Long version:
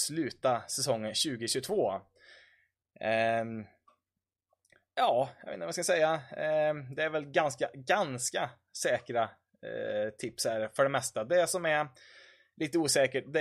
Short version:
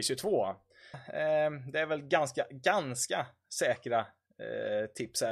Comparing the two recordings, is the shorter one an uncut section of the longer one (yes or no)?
no